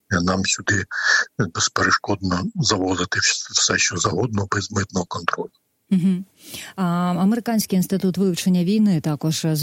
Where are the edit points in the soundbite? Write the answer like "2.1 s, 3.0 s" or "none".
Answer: none